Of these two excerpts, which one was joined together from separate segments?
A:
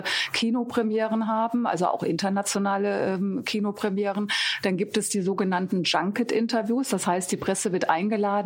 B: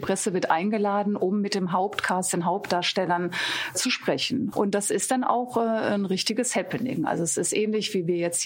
B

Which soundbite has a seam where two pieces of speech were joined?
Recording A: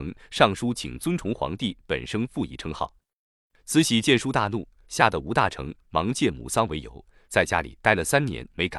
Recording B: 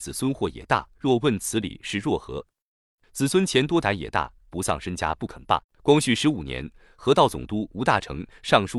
B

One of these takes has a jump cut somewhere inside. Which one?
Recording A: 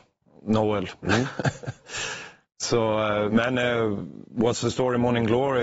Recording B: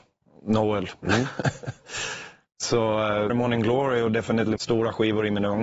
B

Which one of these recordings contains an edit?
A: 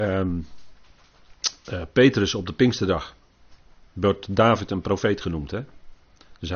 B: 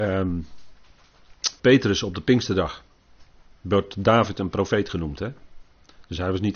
B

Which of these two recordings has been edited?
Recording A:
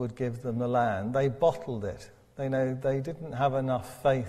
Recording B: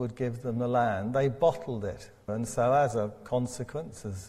B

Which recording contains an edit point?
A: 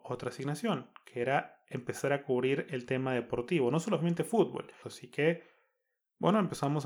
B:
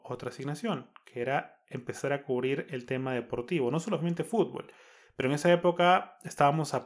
A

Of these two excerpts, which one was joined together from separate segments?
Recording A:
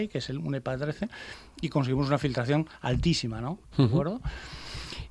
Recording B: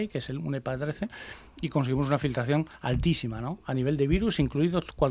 A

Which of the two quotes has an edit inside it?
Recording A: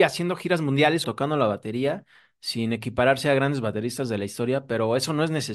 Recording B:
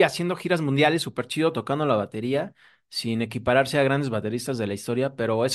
A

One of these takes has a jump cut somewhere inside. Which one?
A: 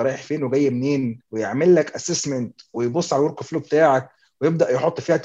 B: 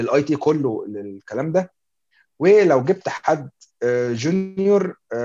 A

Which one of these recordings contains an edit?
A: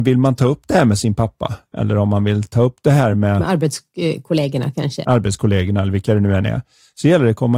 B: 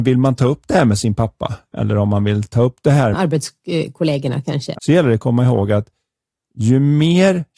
B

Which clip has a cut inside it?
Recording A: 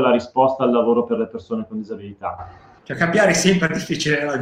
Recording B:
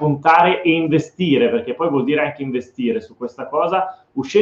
A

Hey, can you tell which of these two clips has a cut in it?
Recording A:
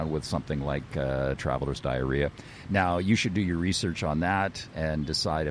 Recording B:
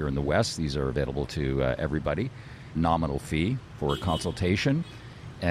B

